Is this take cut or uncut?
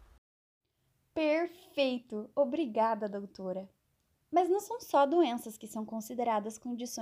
uncut